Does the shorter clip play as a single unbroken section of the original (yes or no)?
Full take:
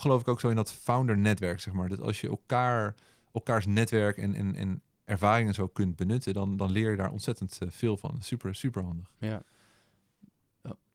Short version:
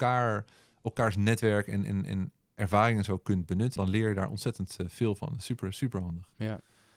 no